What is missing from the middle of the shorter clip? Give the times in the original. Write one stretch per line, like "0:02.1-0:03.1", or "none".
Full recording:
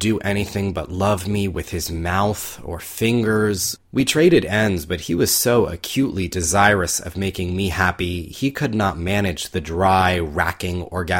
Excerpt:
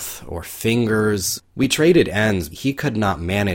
0:04.9-0:08.3